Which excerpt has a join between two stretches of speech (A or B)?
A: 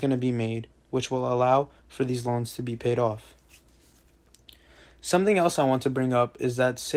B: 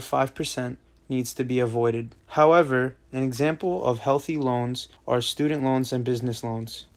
B